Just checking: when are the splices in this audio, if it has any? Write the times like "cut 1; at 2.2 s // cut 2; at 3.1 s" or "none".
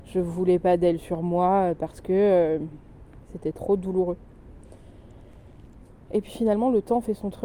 none